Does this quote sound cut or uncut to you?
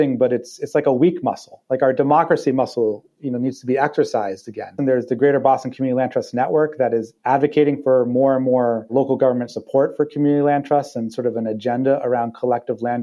cut